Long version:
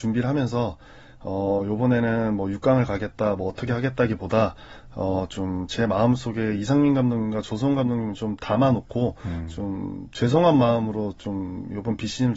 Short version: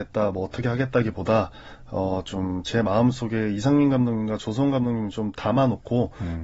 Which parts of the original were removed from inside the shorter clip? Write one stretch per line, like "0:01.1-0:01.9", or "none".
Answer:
none